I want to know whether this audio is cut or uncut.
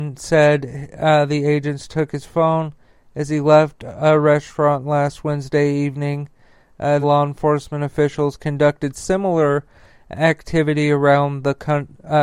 cut